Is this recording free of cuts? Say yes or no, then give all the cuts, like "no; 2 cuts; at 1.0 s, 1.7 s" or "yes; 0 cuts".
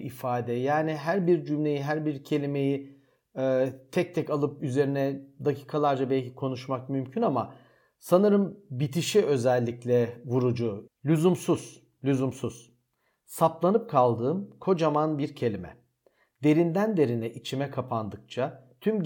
no; 1 cut; at 10.9 s